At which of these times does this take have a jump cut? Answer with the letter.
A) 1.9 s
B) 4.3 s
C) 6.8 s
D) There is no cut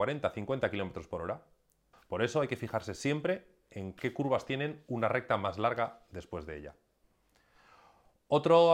A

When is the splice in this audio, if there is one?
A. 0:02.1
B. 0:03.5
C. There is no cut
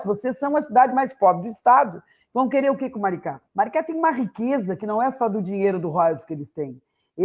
B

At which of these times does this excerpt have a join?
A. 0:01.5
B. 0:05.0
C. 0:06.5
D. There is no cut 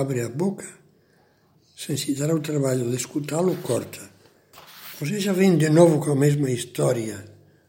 A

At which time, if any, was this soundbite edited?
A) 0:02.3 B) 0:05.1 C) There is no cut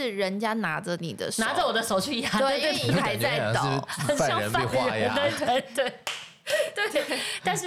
C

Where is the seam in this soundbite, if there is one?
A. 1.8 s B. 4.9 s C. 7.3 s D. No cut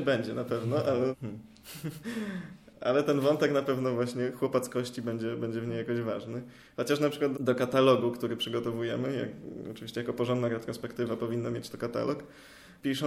C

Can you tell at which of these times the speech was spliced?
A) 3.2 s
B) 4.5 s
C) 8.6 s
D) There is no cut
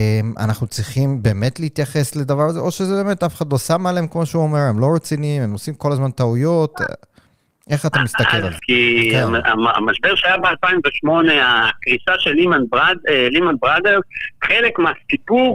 C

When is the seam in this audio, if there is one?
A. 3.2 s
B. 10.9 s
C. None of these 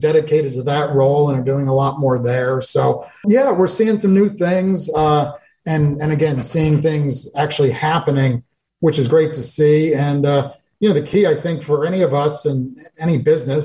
A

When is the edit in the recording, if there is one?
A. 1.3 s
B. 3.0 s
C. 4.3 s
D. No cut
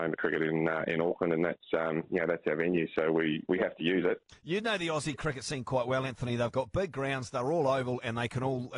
C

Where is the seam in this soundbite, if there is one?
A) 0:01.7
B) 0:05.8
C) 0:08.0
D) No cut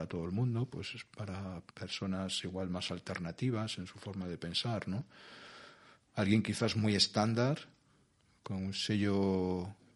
A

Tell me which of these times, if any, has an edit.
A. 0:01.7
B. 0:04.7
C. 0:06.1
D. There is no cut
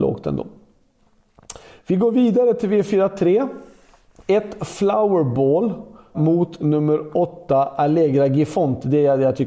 C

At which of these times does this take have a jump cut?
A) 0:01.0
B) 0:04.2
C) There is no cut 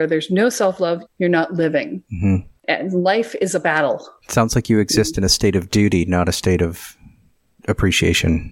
A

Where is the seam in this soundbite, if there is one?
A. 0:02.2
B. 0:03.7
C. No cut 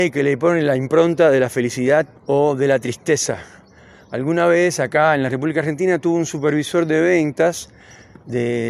A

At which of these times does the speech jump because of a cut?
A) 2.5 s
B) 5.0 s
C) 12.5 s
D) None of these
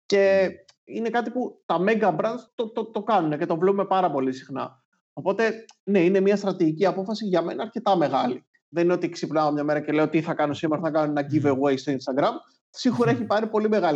A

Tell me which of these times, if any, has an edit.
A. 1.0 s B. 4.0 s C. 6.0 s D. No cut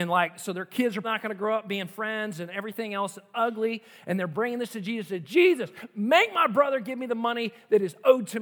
A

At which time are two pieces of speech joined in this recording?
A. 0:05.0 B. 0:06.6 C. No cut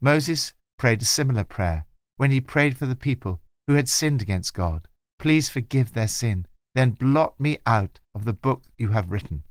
B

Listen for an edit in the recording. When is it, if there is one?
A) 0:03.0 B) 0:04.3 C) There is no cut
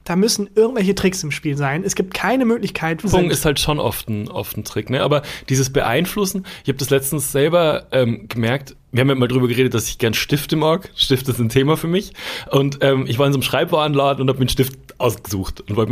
A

